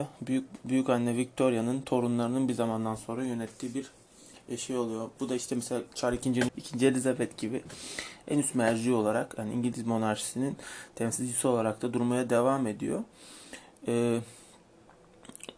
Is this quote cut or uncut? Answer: cut